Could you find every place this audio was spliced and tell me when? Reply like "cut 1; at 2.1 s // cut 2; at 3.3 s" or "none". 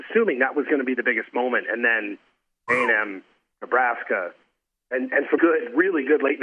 cut 1; at 3.5 s // cut 2; at 5.4 s